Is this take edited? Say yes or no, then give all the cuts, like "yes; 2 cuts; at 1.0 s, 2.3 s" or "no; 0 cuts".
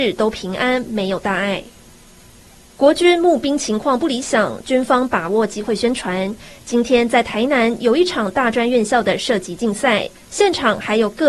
no; 0 cuts